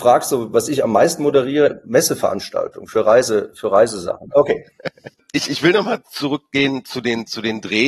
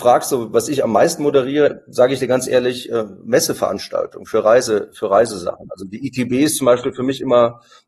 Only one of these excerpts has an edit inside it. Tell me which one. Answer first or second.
first